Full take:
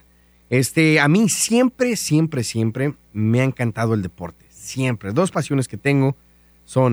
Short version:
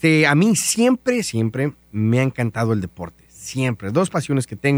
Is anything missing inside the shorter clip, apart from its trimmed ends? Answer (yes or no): yes